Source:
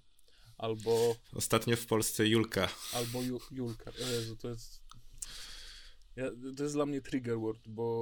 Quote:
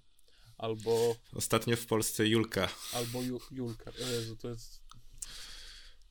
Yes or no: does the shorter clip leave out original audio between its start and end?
no